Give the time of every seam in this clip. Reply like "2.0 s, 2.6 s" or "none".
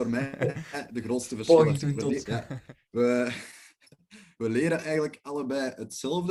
2.3 s